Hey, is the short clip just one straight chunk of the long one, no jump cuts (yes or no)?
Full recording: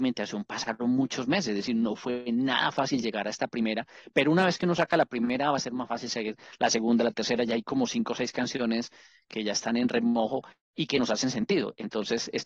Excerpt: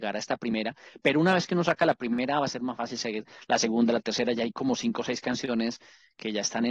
yes